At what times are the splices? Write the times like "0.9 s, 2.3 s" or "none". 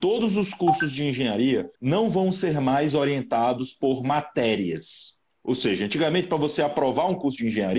1.8 s